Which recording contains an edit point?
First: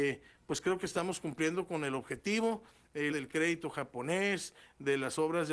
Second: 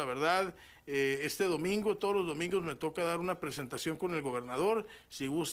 first; 1 cut; at 3.1 s

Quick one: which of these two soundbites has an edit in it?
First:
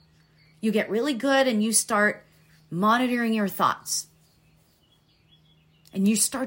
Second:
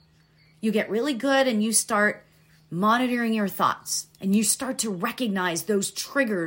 second; 1 cut; at 4.1 s

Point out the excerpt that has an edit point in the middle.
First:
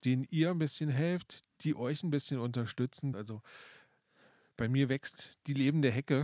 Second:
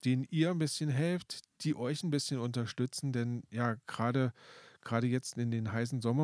first; 1 cut; at 3.1 s

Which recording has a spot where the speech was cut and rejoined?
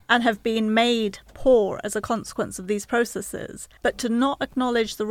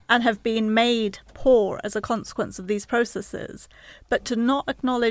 first; 1 cut; at 3.8 s

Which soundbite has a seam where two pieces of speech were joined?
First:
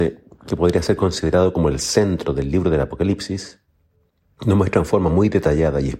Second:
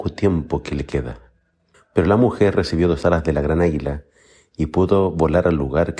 second; 1 cut; at 1.7 s

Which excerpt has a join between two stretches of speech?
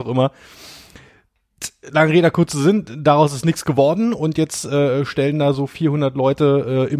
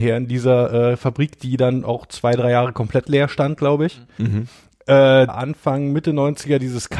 second; 1 cut; at 5.3 s

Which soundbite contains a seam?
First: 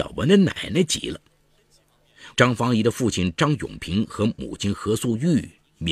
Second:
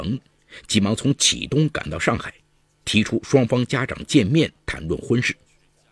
first; 1 cut; at 2.3 s

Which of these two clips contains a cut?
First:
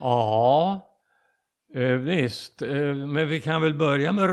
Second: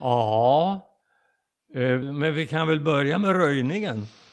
second; 1 cut; at 2.0 s

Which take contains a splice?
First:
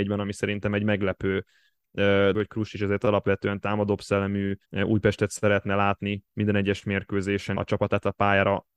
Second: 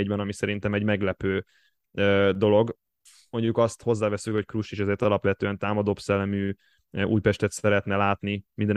first; 3 cuts; at 2.3 s, 4.6 s, 7.6 s

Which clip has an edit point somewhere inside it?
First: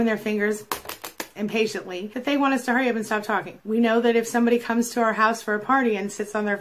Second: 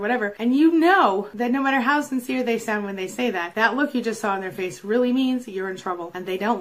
first; 1 cut; at 3.6 s

